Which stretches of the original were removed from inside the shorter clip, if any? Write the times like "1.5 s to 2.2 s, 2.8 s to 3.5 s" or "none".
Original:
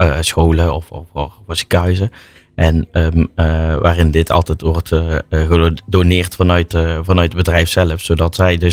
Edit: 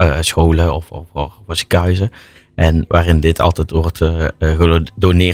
2.9 s to 3.8 s